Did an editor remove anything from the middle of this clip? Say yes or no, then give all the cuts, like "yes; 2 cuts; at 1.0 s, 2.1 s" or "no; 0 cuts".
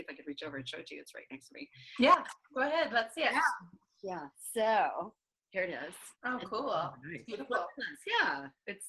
yes; 1 cut; at 6.1 s